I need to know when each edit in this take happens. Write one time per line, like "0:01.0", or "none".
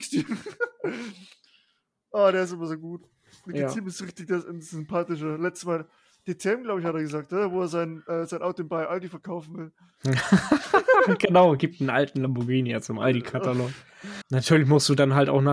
0:11.6
0:14.2